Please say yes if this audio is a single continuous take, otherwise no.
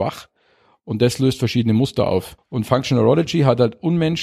no